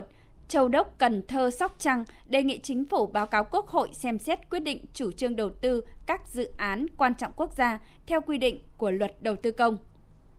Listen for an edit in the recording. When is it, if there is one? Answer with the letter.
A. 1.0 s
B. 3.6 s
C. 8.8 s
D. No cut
D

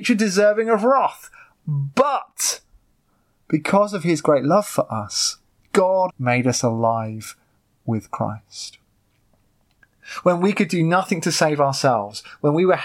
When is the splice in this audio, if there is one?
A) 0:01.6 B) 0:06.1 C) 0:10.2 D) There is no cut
B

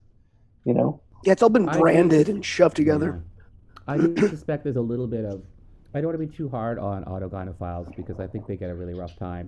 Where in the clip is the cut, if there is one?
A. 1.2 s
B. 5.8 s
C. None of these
A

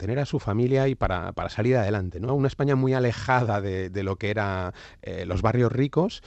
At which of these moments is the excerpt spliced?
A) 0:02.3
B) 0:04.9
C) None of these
A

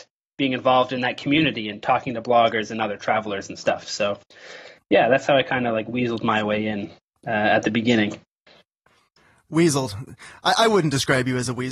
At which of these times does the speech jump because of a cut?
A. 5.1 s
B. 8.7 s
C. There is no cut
C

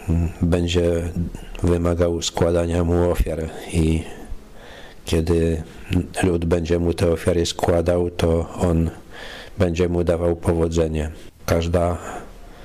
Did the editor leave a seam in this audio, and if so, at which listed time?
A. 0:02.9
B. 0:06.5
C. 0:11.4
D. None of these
C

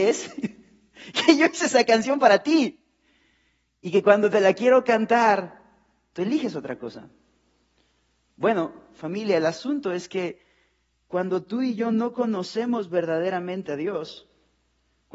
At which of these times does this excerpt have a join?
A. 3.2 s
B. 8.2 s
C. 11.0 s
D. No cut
D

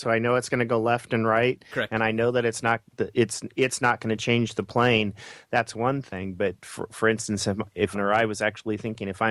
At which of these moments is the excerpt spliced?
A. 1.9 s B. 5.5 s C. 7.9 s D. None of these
C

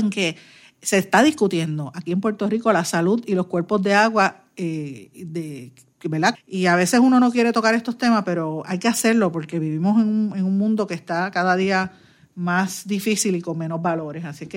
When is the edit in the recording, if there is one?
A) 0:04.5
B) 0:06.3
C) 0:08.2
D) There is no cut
B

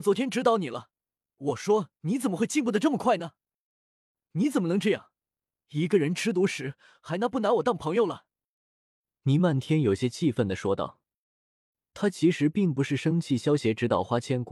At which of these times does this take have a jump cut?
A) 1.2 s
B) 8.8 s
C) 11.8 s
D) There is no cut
D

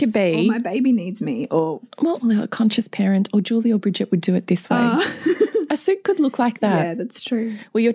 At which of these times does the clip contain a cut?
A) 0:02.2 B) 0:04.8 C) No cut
A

